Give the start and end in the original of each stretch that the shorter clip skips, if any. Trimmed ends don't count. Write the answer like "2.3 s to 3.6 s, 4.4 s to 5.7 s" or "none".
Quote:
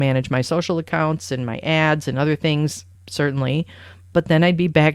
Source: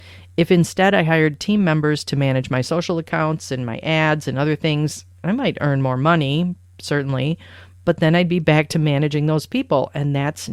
5.1 s to 6.7 s